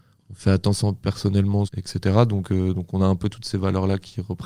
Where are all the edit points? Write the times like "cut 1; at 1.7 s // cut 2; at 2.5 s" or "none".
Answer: cut 1; at 1.7 s